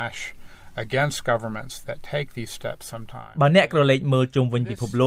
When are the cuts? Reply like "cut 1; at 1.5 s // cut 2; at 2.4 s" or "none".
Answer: cut 1; at 1.8 s